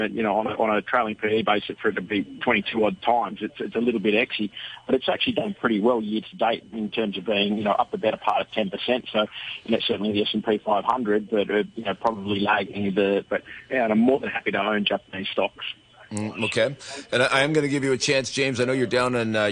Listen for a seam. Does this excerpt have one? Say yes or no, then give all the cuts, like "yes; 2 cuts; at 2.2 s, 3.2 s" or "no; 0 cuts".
yes; 2 cuts; at 9.8 s, 13.2 s